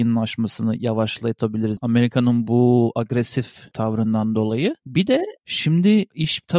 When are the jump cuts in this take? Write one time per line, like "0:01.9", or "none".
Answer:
0:01.8